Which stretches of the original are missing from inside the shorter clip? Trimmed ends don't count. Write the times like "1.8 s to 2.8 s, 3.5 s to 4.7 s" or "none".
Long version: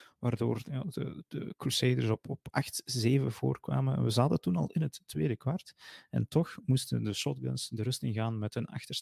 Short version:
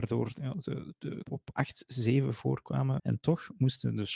1.5 s to 2.2 s, 4.0 s to 6.1 s

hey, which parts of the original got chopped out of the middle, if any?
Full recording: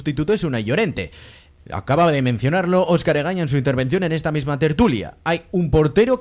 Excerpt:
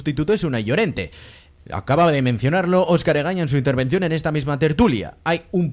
none

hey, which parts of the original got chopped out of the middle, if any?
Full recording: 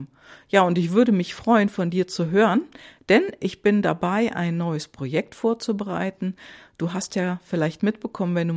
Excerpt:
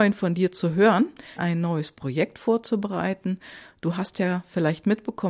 2.9 s to 4.3 s

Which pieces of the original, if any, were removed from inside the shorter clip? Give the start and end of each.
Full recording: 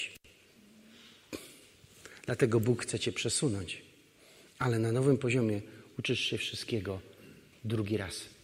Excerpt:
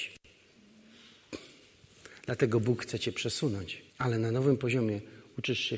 3.9 s to 4.5 s

